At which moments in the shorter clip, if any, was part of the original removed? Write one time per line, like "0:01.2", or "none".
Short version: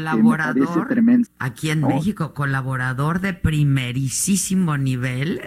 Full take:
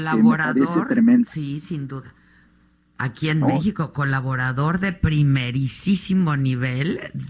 0:01.3